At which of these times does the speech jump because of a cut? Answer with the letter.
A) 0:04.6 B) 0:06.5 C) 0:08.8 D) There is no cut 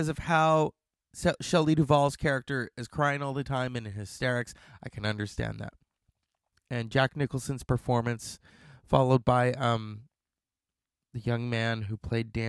B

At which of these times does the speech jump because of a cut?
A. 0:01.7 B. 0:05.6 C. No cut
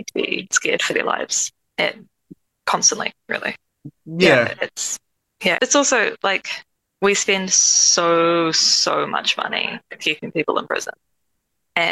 B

